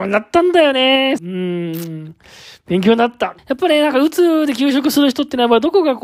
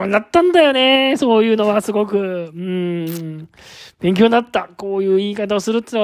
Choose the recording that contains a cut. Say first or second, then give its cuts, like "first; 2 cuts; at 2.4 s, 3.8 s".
first; 2 cuts; at 1.2 s, 3.4 s